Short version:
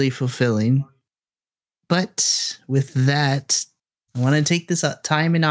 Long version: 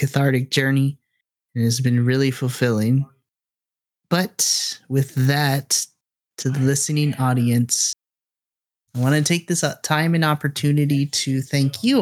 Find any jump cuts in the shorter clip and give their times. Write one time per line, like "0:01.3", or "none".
0:04.0